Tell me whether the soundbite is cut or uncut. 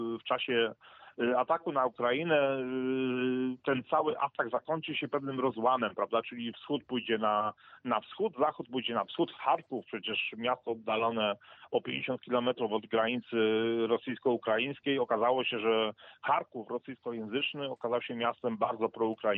cut